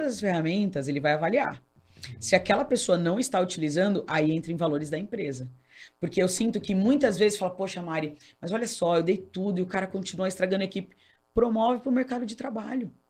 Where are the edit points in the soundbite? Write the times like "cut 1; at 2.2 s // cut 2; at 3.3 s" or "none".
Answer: none